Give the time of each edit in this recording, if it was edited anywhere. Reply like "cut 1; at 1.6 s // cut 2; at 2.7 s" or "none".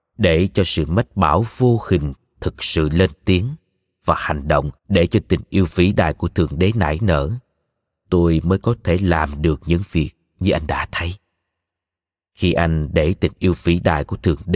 cut 1; at 4.8 s